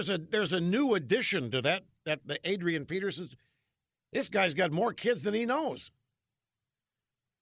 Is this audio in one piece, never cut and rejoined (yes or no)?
yes